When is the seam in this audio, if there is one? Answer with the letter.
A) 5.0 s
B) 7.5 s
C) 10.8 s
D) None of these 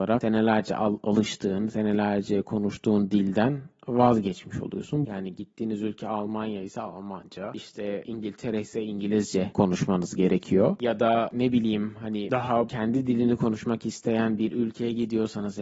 A